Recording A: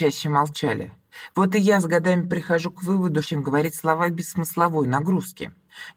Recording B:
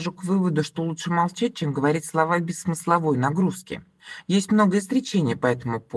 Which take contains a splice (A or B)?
A